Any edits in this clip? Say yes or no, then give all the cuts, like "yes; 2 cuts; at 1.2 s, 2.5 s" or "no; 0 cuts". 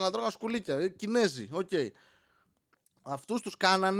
no; 0 cuts